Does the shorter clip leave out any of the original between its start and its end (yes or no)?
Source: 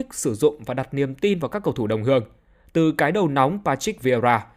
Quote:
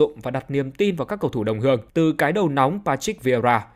yes